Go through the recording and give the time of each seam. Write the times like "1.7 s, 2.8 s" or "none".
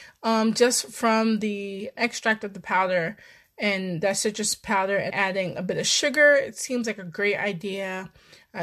2.0 s, 5.1 s